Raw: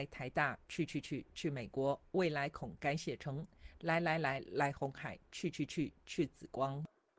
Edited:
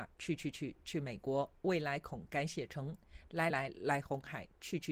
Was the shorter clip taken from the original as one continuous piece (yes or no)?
no